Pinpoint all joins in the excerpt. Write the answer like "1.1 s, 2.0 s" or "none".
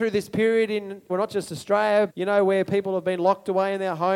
1.1 s, 2.1 s